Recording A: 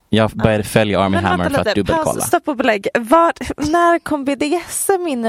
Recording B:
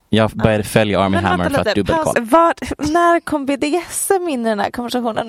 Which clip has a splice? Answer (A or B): B